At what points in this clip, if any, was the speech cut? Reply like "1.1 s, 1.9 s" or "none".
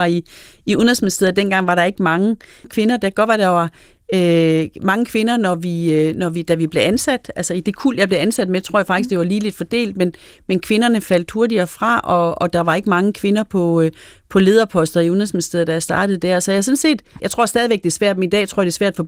17.2 s